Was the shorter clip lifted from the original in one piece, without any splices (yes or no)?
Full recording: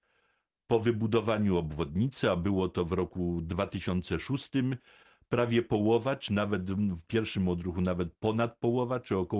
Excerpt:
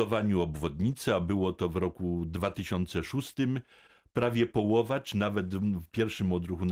yes